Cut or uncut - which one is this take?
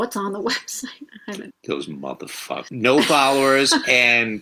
cut